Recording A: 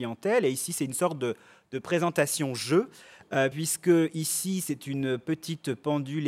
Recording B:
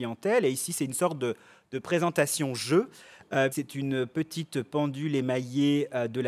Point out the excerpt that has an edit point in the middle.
B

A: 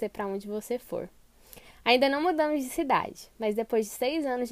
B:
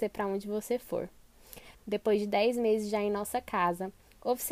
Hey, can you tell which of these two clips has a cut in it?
B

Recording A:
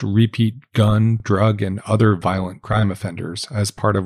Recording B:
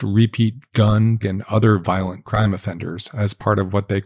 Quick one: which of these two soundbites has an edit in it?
B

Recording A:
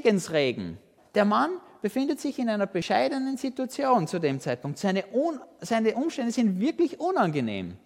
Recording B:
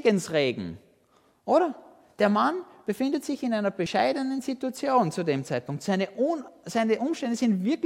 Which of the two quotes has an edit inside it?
A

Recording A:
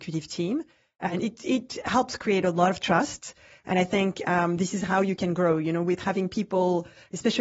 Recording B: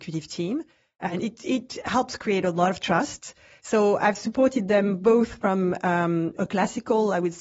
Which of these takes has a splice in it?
B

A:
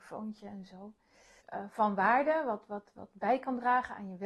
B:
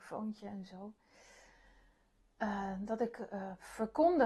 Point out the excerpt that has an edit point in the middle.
A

